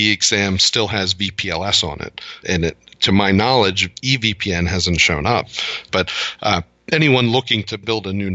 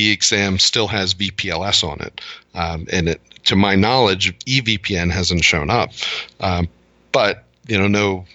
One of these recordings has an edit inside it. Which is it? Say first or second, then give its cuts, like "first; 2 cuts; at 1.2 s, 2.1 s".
first; 2 cuts; at 2.4 s, 5.9 s